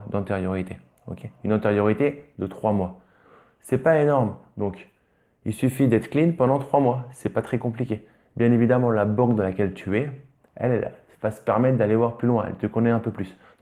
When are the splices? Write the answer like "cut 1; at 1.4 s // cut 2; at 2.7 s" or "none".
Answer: none